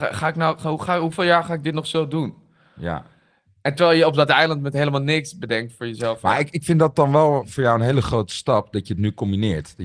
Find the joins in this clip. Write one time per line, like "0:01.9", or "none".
none